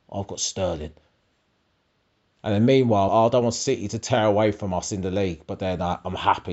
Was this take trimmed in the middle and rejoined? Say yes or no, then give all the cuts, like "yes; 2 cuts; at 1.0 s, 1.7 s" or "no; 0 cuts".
yes; 1 cut; at 3.1 s